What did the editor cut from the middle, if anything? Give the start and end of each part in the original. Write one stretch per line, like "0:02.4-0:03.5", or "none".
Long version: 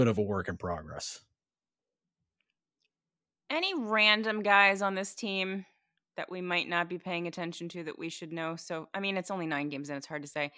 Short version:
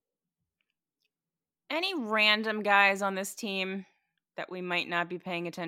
none

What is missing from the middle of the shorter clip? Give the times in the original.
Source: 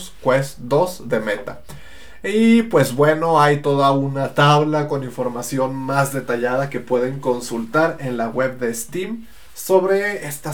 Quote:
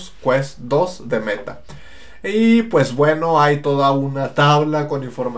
none

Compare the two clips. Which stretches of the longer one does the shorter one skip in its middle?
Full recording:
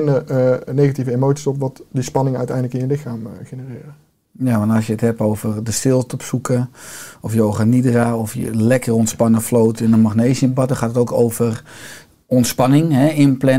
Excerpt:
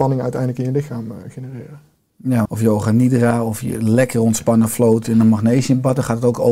0:04.6-0:07.2

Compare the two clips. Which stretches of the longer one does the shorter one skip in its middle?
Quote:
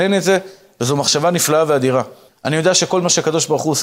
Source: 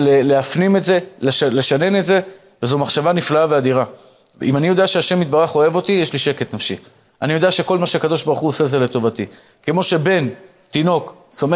0:04.1-0:07.0

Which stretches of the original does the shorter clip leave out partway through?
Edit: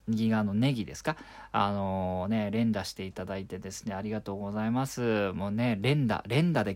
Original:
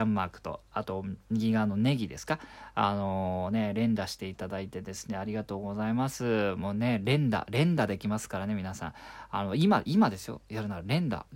none

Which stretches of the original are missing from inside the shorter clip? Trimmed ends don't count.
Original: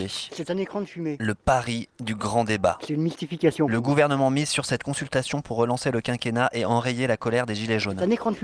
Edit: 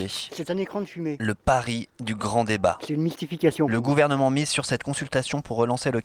none

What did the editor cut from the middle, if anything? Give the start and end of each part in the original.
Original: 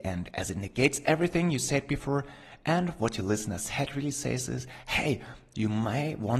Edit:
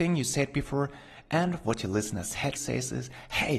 0:03.9-0:04.1

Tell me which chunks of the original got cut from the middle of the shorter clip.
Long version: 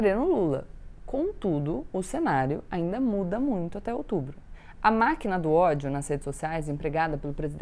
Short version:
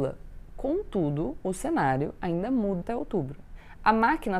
0:03.3-0:03.8

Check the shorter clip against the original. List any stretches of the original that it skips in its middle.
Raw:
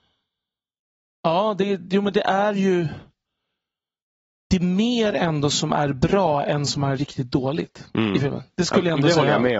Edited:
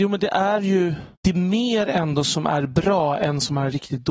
0:03.1-0:04.4

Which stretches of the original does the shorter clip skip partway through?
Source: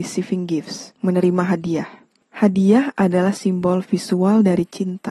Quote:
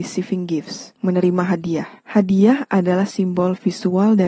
0:02.0-0:02.2

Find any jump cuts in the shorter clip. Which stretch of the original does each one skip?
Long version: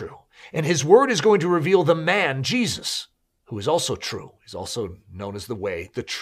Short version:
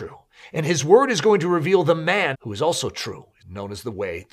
0:02.3-0:03.4
0:04.5-0:05.0

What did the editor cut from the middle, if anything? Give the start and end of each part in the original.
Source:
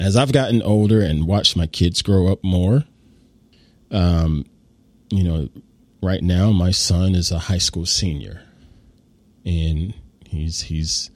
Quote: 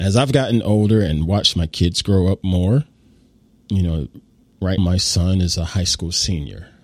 0:03.5-0:04.9
0:06.2-0:06.5

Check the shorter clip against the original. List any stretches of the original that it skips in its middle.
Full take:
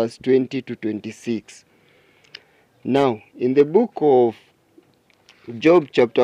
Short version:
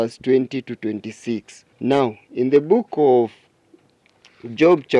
0:01.7-0:02.8

